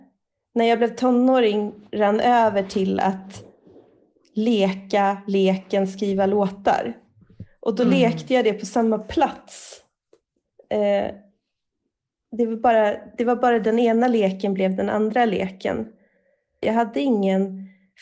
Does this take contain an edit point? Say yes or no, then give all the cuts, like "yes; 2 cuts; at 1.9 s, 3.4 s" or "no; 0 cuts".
yes; 1 cut; at 16.6 s